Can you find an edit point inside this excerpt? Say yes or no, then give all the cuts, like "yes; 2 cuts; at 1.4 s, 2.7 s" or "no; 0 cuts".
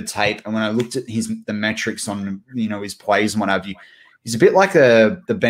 no; 0 cuts